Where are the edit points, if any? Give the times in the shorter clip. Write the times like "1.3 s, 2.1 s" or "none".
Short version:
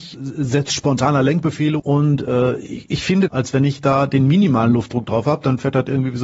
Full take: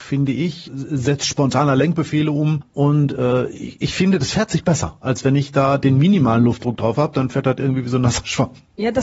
1.8 s, 3.3 s